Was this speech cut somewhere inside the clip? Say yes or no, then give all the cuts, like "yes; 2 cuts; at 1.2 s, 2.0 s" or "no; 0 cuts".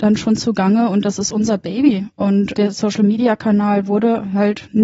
yes; 1 cut; at 2.5 s